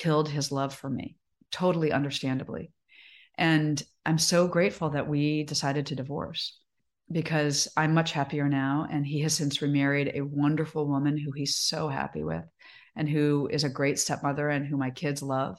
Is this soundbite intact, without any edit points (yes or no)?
yes